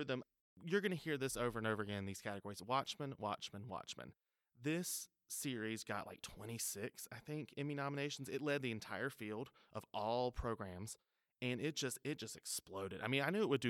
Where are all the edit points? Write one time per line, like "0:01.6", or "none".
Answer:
none